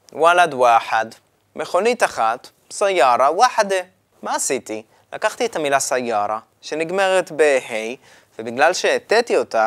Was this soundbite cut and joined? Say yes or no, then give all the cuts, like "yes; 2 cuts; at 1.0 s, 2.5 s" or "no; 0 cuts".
yes; 1 cut; at 4.1 s